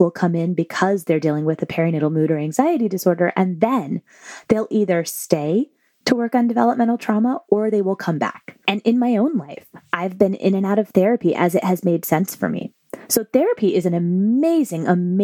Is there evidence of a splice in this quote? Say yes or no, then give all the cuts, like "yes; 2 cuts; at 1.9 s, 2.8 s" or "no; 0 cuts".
no; 0 cuts